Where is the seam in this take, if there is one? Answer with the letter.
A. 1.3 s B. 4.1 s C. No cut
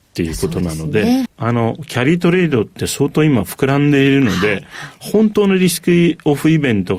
A